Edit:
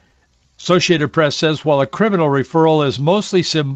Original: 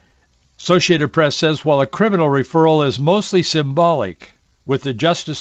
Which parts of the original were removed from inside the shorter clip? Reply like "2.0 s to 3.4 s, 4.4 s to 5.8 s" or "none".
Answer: none

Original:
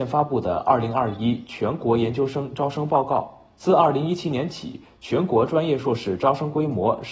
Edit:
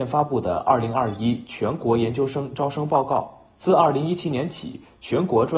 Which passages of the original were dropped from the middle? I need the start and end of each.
none

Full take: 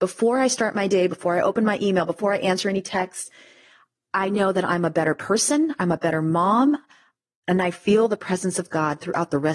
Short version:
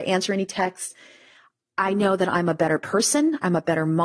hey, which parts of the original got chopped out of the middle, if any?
none

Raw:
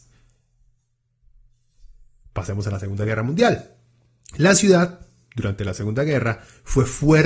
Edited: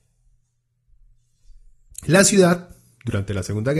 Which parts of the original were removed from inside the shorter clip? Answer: 2.3 s to 4.2 s

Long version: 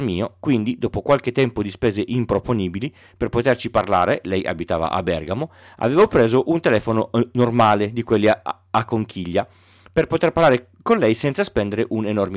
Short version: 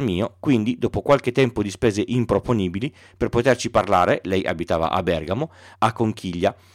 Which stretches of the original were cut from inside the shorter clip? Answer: 5.7 s to 8.7 s

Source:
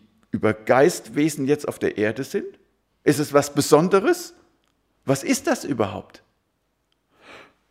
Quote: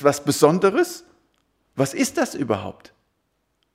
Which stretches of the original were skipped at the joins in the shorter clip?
none

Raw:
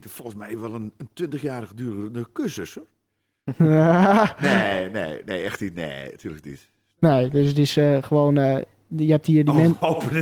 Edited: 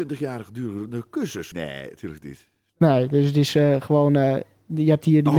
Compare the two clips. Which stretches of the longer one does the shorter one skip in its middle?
2.7 s to 5.7 s

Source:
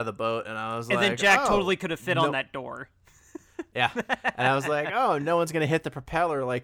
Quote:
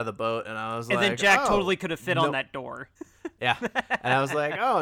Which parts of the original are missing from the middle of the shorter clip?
3.0 s to 3.3 s

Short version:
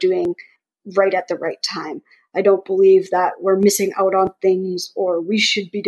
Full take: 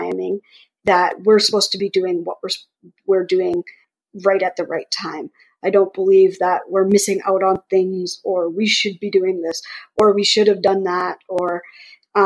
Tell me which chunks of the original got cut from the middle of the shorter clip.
none

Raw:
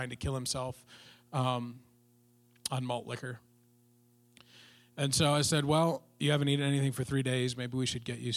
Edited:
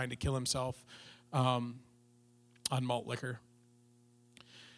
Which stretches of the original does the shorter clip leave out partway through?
none

